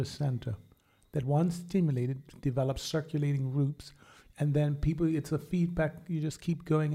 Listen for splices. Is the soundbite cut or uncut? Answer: uncut